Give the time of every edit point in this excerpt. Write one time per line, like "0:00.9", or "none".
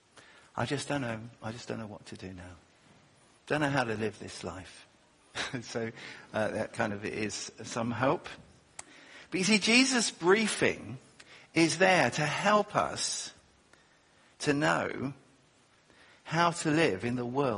0:05.3